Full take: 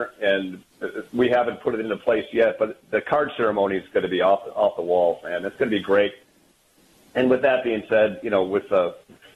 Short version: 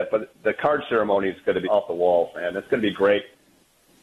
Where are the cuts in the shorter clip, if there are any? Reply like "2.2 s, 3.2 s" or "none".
1.6 s